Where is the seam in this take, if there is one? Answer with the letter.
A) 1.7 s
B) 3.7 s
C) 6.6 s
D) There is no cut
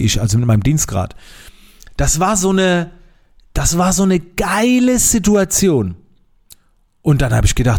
D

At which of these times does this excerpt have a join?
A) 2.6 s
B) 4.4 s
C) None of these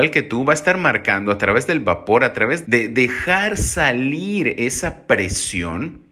A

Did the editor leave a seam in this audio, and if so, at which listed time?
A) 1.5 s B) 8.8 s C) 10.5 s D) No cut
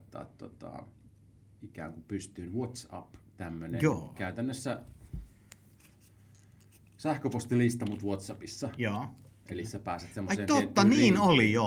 D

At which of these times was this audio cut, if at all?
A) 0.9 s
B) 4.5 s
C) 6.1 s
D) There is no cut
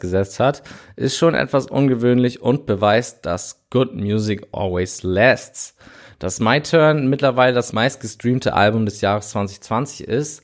D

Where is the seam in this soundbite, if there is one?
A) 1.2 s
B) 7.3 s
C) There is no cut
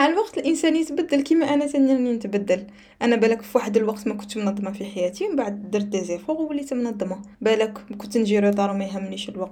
B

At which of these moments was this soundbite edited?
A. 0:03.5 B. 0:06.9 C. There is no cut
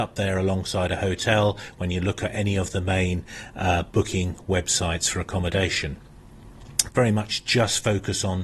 B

